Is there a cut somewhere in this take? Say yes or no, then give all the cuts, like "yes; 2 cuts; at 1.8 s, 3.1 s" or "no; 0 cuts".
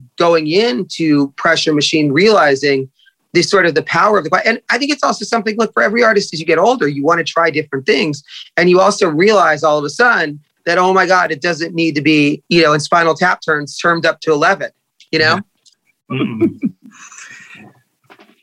no; 0 cuts